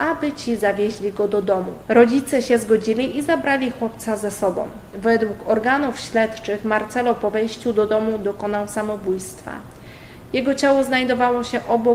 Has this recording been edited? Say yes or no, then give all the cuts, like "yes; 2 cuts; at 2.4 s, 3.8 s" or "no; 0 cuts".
no; 0 cuts